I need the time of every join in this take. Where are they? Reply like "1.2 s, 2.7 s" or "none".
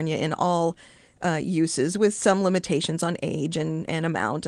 none